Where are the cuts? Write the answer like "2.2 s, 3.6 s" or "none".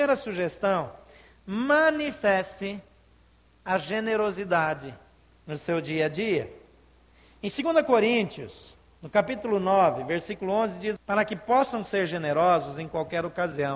11.0 s